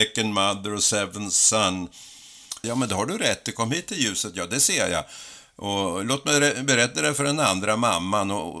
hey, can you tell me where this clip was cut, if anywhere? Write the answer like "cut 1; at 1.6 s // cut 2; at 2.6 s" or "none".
cut 1; at 2.6 s